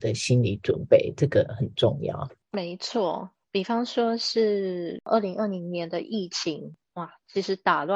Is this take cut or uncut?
uncut